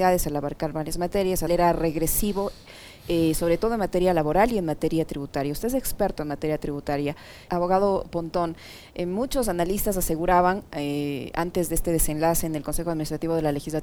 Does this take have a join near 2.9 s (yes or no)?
no